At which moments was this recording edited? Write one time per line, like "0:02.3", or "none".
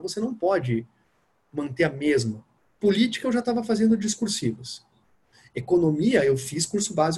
none